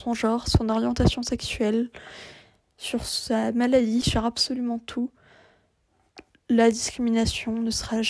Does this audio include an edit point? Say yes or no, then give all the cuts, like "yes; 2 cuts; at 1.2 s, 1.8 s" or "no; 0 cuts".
yes; 1 cut; at 4.0 s